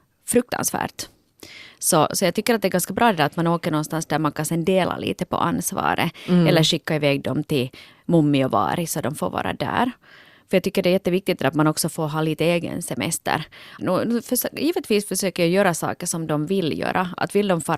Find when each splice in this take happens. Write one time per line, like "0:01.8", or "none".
0:13.8